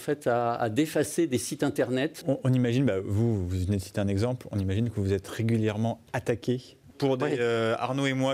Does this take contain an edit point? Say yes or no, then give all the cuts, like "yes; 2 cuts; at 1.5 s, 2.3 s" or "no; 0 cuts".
yes; 2 cuts; at 2.2 s, 6.9 s